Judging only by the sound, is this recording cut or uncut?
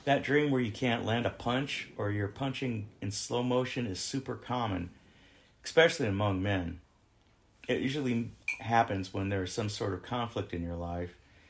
uncut